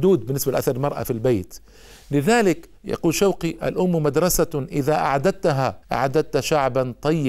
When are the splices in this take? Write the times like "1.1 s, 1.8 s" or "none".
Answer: 2.8 s, 5.8 s